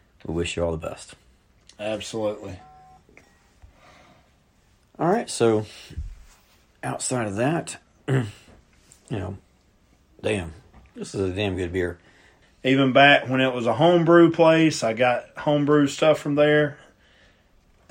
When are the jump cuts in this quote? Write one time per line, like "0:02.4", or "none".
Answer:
0:12.4